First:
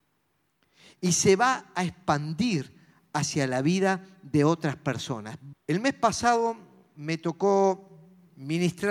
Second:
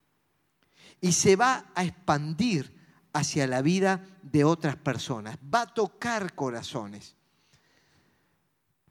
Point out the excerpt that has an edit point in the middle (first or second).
first